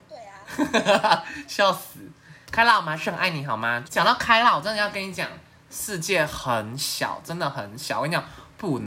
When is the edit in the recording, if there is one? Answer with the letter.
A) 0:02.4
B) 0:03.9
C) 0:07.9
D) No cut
B